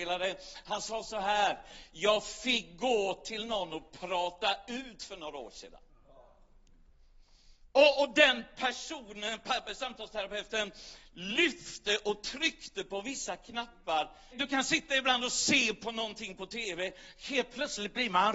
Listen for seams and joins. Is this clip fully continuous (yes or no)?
no